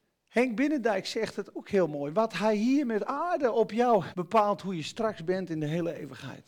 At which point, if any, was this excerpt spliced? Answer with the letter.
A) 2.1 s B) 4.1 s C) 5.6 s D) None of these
B